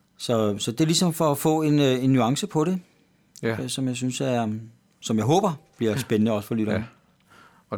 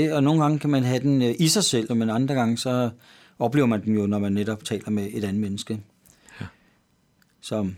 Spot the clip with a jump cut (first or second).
second